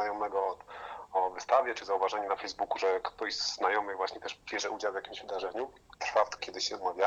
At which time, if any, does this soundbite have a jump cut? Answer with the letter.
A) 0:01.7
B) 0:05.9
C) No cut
B